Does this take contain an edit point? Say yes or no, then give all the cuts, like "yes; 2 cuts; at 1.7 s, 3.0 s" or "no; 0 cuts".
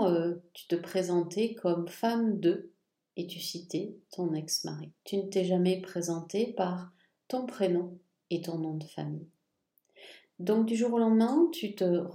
no; 0 cuts